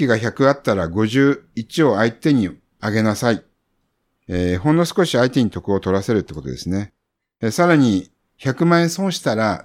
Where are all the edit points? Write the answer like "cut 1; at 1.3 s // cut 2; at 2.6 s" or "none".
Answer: none